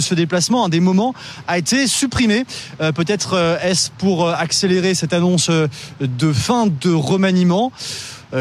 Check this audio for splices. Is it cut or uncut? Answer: uncut